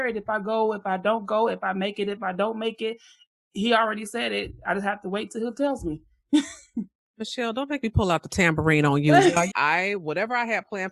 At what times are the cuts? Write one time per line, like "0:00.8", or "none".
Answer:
0:09.5